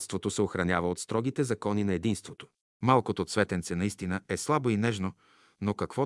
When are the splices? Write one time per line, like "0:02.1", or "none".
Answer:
0:02.6